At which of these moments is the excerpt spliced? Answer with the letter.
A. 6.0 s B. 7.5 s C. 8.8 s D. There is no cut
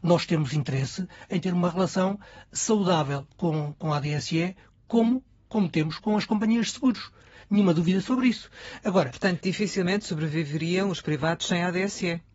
A